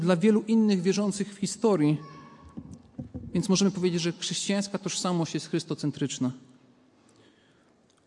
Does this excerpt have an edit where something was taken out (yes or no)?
no